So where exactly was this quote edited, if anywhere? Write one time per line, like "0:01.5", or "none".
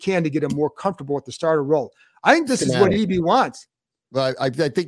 none